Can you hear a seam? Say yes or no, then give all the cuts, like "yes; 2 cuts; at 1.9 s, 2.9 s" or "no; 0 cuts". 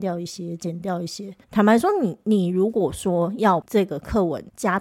yes; 1 cut; at 1.4 s